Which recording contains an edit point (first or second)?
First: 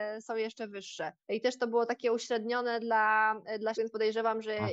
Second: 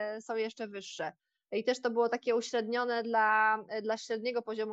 first